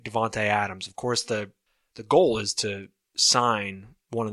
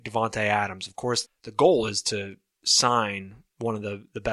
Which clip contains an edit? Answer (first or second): second